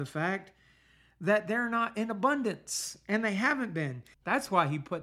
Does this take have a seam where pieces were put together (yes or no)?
yes